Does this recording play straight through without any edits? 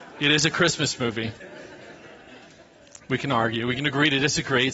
no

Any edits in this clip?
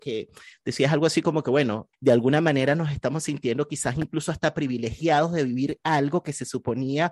yes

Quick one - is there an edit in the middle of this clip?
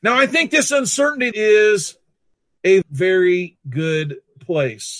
yes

